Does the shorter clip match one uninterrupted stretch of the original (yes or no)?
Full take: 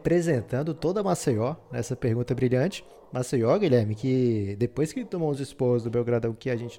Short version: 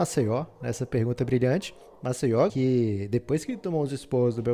no